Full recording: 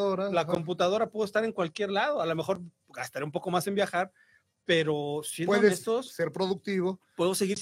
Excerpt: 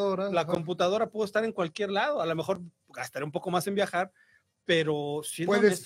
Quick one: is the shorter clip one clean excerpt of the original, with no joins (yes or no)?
yes